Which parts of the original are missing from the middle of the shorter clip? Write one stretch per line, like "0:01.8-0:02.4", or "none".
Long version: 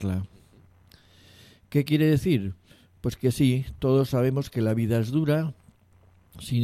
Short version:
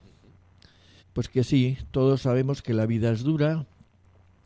0:01.3-0:02.9

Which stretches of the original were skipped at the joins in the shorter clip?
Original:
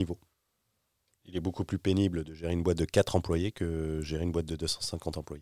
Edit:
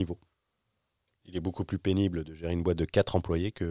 none

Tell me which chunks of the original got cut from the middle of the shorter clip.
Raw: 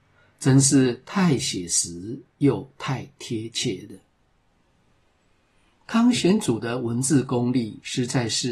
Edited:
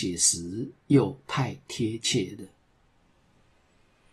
none

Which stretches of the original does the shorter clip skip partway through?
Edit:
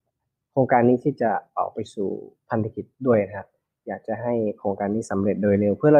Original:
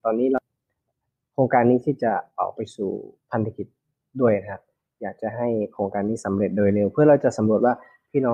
0:03.8-0:04.1

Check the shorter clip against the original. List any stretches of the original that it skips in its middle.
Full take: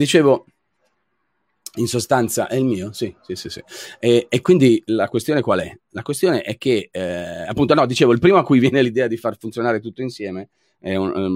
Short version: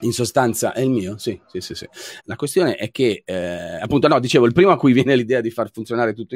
0:03.9-0:05.9

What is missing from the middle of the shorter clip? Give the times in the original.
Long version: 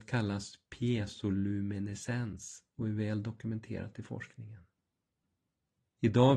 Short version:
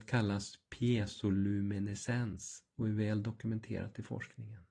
none

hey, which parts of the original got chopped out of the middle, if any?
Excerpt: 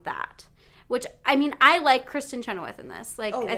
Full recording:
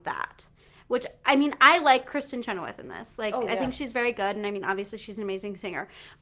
none

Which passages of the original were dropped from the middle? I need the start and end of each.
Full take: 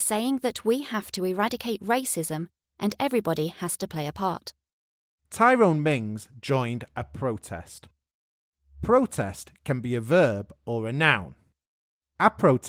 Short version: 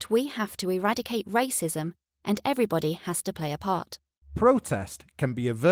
0:04.8-0:08.7

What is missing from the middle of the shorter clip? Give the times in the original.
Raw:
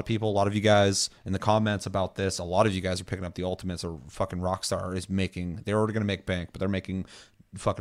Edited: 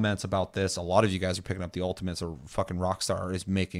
none

